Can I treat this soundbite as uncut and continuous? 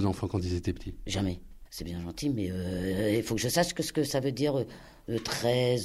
no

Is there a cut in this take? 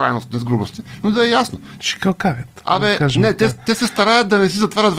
yes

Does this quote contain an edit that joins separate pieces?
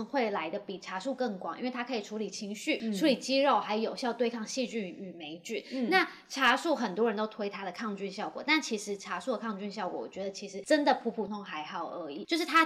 yes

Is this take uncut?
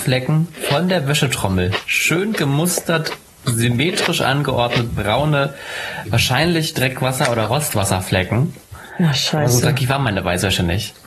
yes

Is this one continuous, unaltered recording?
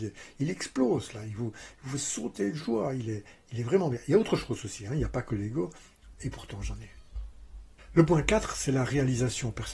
no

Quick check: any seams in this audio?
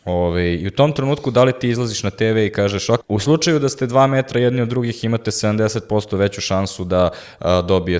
yes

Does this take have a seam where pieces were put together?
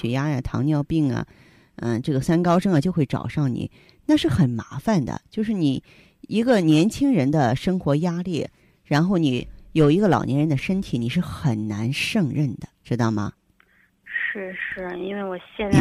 no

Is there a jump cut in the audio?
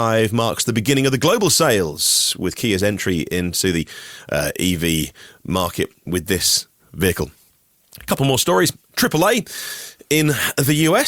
no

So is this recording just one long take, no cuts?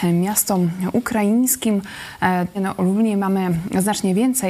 no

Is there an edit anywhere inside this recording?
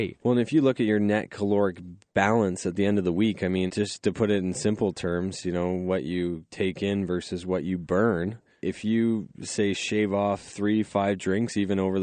yes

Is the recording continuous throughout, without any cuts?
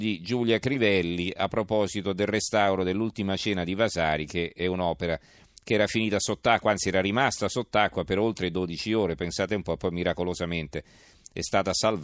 yes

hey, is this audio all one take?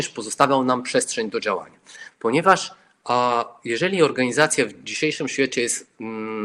no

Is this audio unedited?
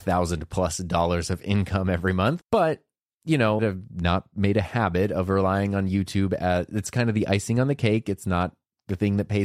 no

